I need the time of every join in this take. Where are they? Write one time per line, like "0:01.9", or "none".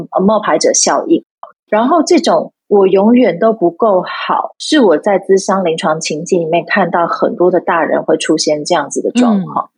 0:01.4